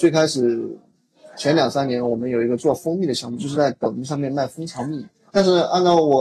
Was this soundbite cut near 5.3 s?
yes; 1 cut; at 5.3 s

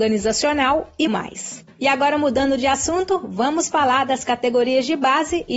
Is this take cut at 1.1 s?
yes; 1 cut; at 1.1 s

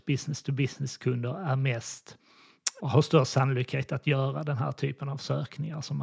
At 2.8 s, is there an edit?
yes; 1 cut; at 2.8 s

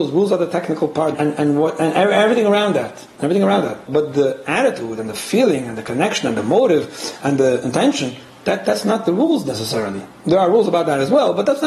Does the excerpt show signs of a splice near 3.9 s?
yes; 2 cuts; at 1.1 s, 3.9 s

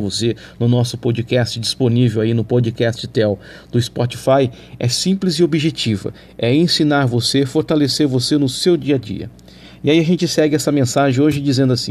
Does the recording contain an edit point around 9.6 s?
no; 0 cuts

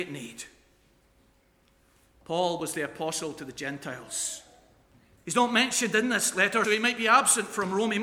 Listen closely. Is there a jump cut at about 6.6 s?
yes; 2 cuts; at 5.2 s, 6.6 s

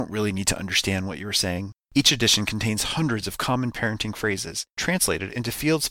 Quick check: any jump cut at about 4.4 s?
no; 1 cut; at 1.9 s

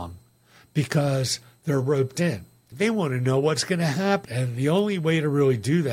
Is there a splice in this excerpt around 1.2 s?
no; 2 cuts; at 2.7 s, 4.2 s

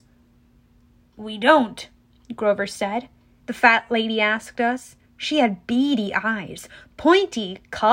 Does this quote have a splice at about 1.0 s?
no; 2 cuts; at 3.4 s, 5.0 s

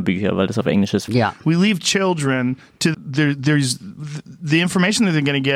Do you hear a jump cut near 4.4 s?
no; 2 cuts; at 1.1 s, 2.9 s

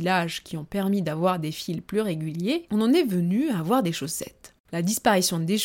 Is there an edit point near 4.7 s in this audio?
yes; 1 cut; at 4.7 s

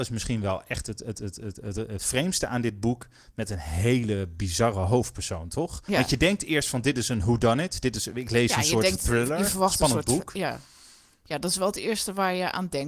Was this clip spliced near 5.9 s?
no; 0 cuts

